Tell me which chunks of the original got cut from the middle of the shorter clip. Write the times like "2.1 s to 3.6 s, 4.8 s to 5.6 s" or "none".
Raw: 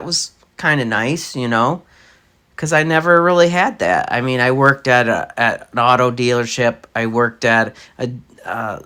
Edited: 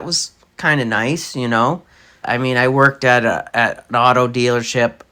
2.2 s to 4.1 s